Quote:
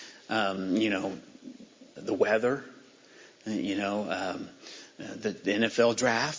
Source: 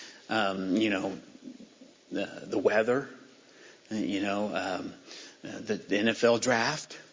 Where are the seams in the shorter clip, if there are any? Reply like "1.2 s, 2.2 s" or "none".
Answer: 2.0 s